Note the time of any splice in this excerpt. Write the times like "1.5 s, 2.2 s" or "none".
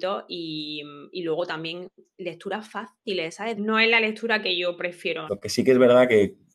3.6 s, 5.3 s